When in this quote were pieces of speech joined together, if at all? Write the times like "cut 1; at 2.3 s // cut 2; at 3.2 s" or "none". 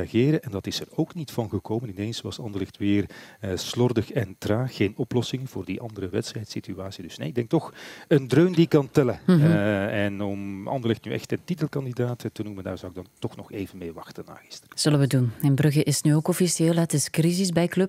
none